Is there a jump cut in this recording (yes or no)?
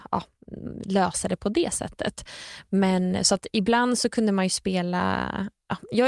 no